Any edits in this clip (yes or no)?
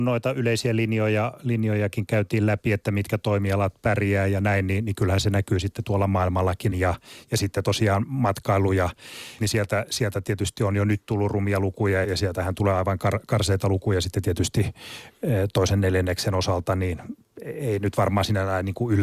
yes